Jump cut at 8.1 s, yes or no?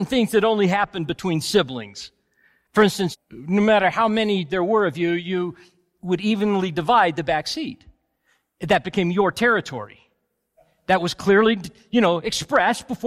no